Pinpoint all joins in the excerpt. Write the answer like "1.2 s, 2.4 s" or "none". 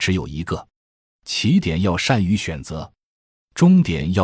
none